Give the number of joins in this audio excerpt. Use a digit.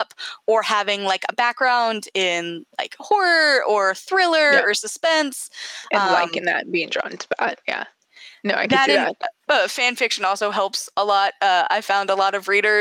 0